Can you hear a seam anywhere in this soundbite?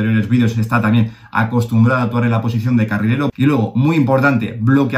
yes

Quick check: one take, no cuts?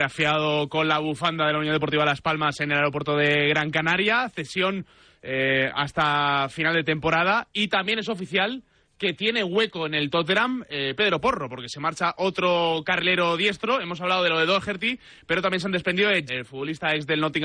no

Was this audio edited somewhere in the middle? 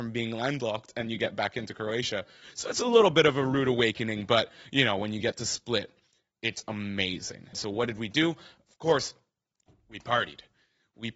yes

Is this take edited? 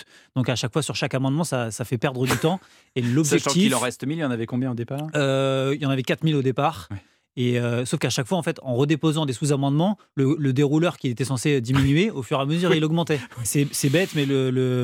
yes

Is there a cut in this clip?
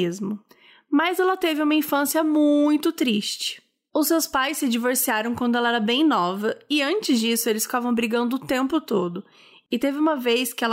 no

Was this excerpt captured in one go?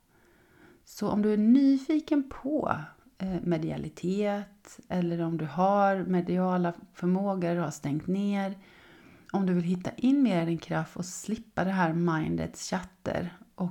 yes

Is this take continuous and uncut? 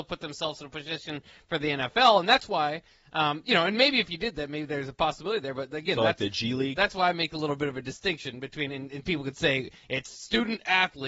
yes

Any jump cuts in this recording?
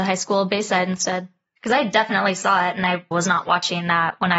yes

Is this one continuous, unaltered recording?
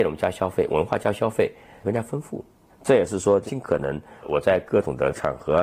no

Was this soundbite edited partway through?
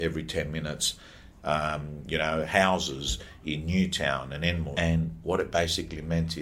yes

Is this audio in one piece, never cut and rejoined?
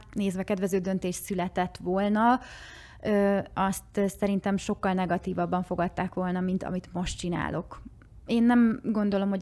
yes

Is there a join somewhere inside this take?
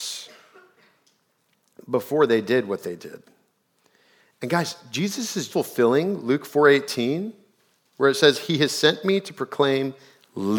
yes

